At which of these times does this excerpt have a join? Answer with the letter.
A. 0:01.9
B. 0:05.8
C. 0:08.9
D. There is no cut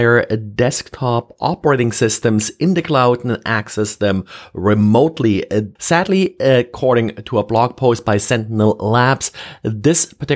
B